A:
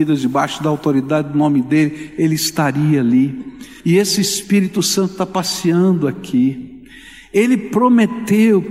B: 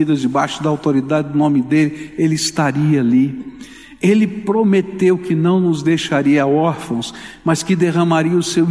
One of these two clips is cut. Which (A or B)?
A